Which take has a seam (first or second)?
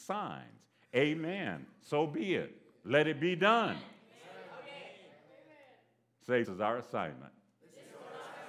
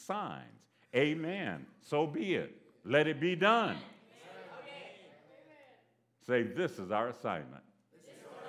first